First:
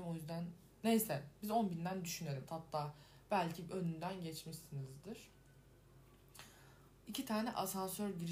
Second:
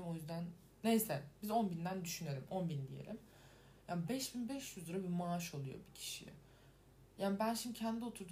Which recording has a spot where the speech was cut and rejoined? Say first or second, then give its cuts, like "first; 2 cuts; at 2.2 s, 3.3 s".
first; 2 cuts; at 2.5 s, 7.1 s